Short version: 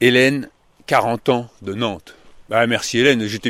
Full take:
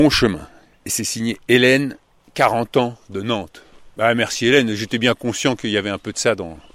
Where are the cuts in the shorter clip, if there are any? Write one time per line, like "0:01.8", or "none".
none

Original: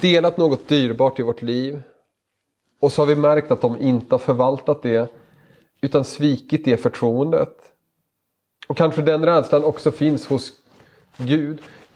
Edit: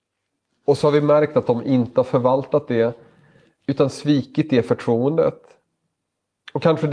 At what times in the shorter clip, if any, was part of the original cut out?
none

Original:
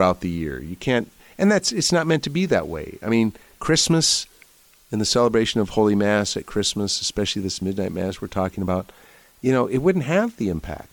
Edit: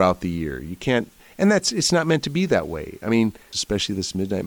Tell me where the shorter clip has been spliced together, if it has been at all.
0:03.5

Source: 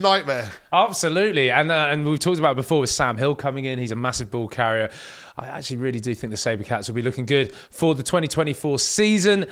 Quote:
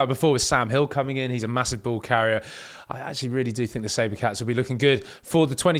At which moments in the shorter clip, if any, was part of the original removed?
none

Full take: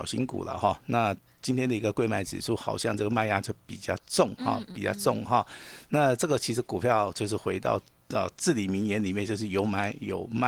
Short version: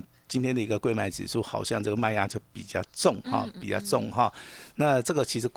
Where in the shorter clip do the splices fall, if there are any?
none

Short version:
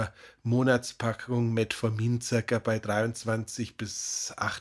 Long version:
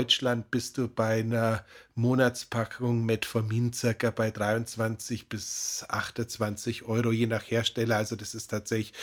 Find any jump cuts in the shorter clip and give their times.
none

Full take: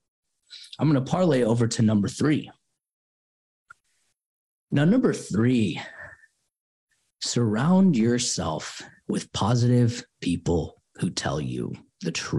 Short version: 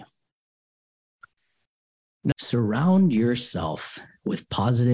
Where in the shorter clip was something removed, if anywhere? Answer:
0:02.3

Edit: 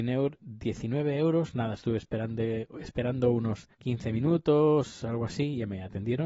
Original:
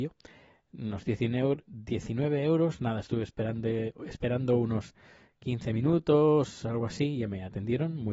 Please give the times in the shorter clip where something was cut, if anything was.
0:03.7

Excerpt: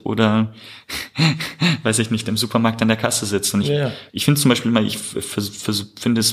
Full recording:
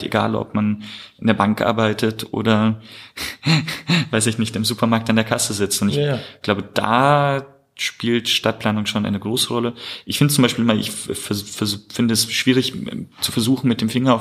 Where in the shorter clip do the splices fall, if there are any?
0:04.1

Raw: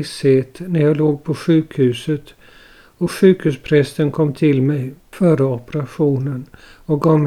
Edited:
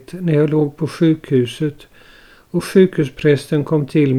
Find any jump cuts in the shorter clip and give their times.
none

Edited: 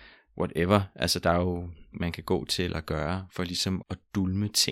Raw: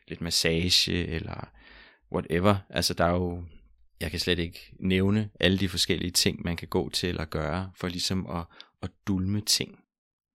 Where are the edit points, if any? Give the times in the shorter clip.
0:01.9
0:03.8

